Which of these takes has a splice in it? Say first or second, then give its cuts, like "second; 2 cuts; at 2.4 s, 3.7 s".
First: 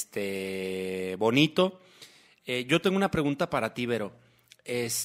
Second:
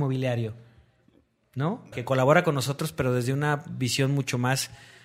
second; 1 cut; at 1.9 s